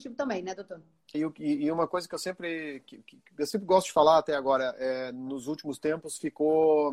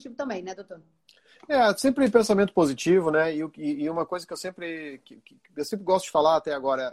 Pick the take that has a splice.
first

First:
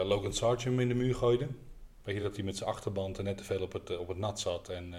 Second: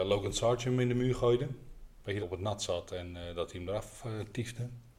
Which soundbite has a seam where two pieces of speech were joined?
second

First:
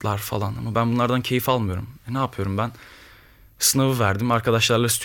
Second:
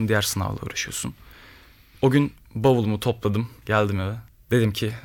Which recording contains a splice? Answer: second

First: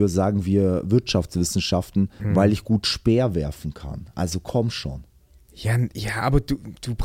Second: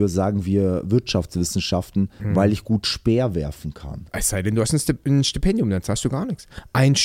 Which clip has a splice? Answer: second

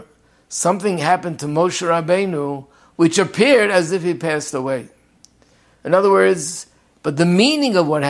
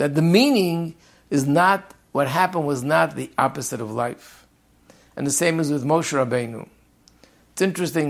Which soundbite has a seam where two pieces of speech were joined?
first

